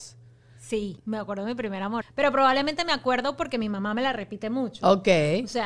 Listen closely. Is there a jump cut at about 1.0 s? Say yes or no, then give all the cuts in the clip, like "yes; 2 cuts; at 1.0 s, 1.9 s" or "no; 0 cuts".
yes; 2 cuts; at 1.0 s, 2.0 s